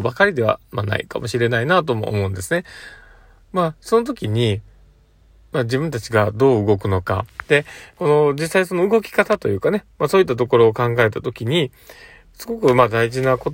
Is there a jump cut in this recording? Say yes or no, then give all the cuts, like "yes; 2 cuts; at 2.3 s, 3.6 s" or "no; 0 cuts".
no; 0 cuts